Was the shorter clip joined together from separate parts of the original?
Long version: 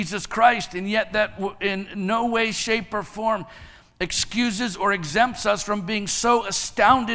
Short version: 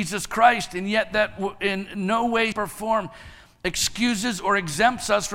yes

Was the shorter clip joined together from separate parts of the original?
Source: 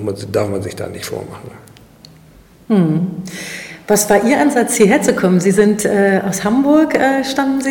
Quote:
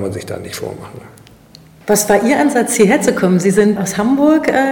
yes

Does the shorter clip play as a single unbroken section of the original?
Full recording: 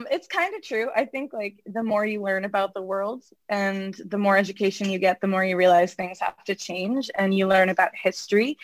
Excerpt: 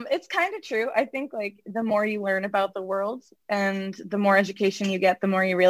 yes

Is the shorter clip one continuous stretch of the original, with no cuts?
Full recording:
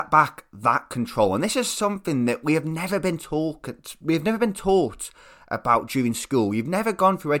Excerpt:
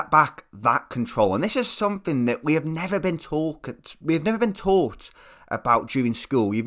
yes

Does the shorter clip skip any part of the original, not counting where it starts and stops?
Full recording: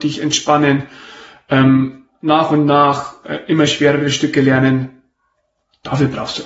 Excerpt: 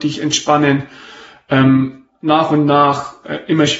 no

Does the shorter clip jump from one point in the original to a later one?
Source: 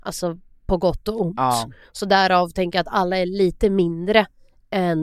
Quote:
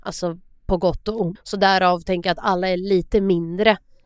yes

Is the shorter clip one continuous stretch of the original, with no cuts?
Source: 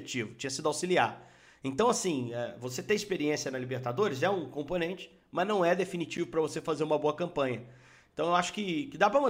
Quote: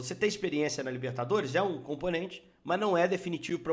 yes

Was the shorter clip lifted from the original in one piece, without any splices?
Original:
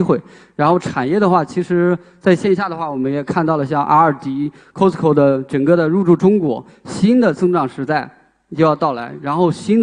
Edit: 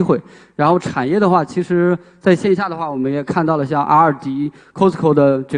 yes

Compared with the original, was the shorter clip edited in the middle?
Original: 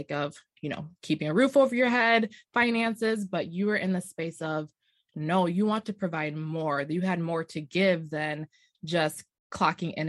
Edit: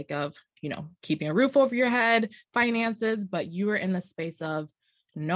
no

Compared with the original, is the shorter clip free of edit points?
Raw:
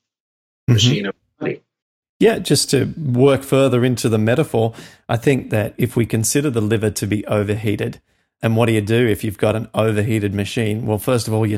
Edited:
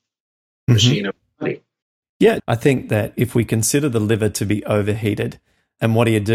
no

